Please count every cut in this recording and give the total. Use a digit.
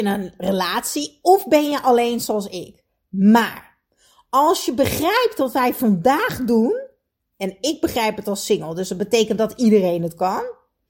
0